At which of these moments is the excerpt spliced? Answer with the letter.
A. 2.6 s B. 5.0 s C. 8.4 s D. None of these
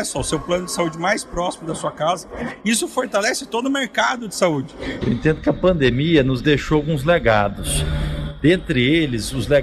B